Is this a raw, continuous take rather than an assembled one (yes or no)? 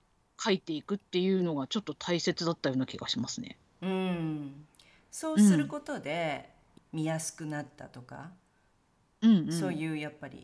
no